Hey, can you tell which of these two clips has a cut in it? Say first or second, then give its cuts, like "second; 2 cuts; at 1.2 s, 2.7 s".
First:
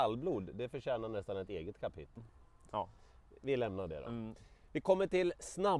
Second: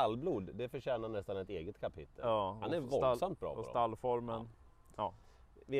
first; 1 cut; at 2.2 s